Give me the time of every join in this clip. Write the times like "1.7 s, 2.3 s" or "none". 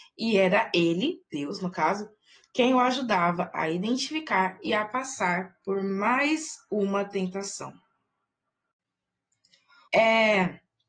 9.9 s

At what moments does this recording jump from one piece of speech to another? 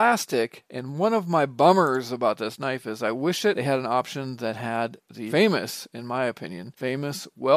none

